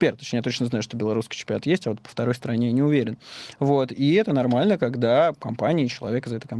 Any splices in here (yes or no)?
no